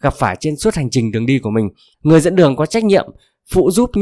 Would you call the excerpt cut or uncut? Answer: cut